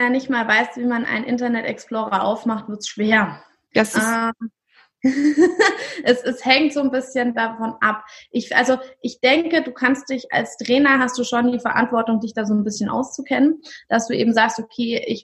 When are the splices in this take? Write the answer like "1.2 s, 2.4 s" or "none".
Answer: none